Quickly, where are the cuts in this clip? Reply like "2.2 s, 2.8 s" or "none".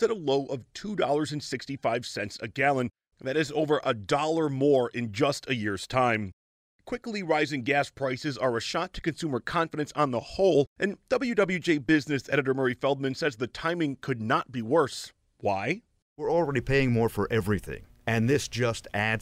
none